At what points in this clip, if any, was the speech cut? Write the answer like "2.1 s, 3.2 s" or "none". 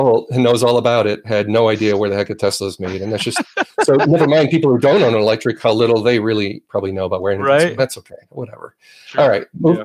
7.8 s